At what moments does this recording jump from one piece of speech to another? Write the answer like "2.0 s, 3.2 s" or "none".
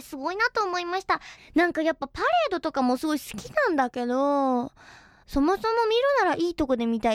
1.4 s, 5.2 s